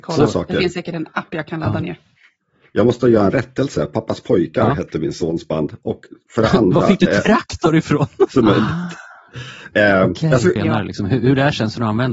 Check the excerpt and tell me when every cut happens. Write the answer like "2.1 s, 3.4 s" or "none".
8.3 s, 10.6 s